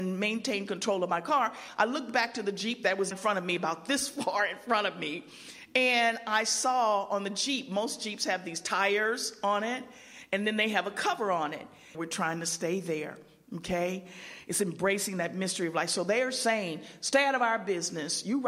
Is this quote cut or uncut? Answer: cut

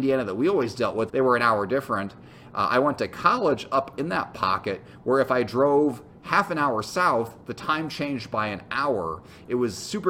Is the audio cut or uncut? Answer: cut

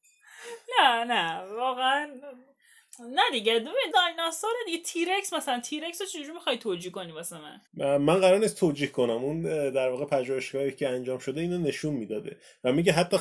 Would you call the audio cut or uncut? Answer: cut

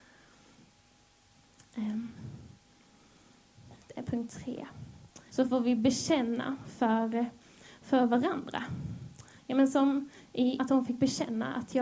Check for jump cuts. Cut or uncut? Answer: cut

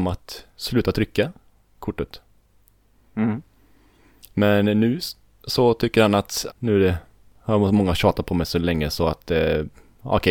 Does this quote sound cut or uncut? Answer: cut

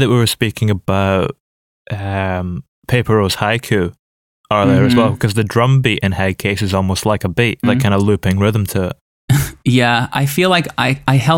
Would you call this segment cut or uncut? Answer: cut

